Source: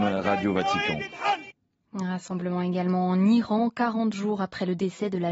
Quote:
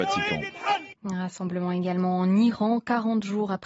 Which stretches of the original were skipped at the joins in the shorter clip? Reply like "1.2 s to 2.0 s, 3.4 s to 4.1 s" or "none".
1.5 s to 1.9 s